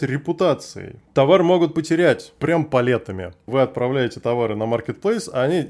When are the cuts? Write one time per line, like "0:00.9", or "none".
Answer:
0:01.1
0:03.5